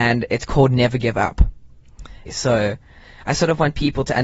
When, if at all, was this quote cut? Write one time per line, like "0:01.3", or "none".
0:02.2